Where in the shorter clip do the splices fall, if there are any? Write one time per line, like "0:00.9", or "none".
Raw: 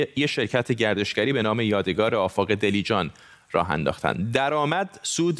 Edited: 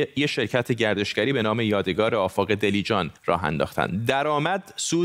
0:03.2